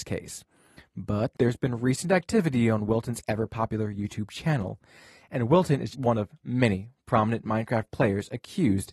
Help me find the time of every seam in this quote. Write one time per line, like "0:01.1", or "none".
0:05.9